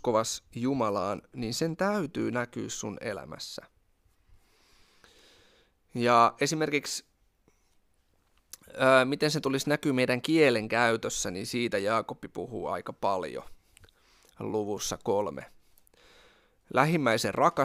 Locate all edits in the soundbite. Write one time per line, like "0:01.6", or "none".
none